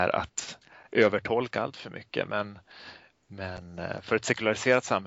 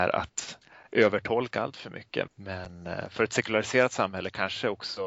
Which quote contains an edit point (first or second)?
second